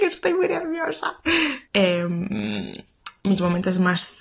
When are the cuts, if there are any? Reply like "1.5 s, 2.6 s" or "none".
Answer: 1.6 s

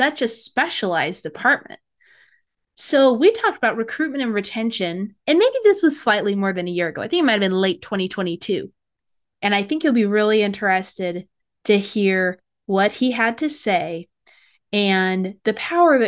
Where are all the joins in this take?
9.3 s

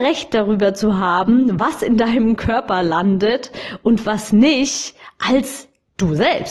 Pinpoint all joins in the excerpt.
none

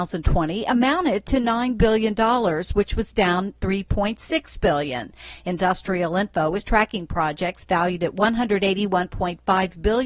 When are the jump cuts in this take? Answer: none

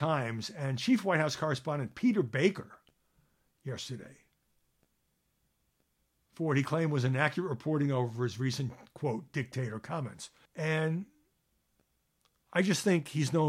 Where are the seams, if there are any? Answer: 10.5 s

